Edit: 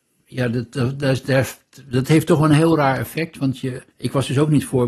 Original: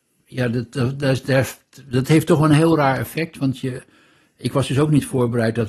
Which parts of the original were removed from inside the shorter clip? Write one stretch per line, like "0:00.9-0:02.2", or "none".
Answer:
0:03.9-0:04.3